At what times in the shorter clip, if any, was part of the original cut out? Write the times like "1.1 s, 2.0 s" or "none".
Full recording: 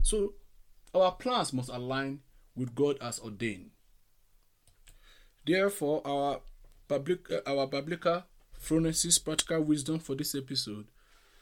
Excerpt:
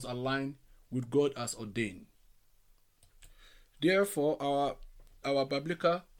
5.2 s